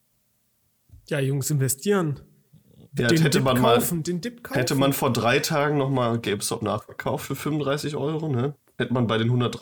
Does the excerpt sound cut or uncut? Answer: uncut